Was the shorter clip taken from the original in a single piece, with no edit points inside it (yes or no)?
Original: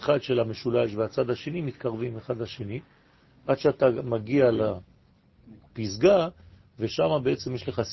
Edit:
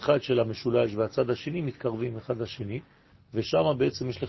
no